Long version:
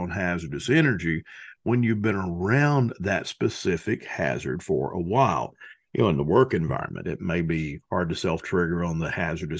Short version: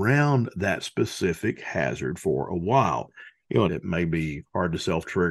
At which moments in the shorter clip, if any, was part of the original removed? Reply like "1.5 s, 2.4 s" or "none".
3.7 s